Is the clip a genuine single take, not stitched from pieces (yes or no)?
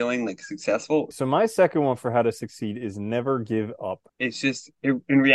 no